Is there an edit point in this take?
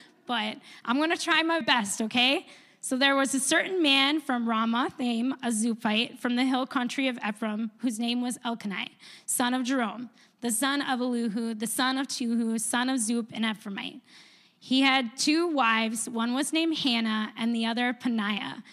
yes; 1 cut; at 1.6 s

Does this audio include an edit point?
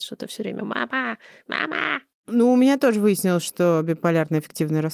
no; 0 cuts

